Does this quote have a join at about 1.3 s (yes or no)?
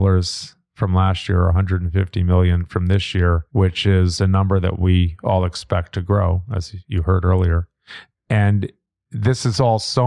no